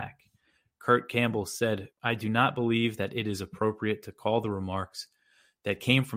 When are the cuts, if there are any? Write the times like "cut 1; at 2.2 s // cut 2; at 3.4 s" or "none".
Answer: cut 1; at 1.9 s